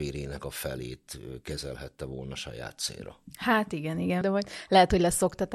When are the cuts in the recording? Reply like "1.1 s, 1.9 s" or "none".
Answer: 4.2 s